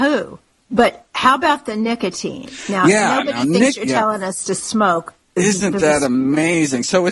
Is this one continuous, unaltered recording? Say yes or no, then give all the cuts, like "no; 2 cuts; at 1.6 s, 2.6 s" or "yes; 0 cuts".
yes; 0 cuts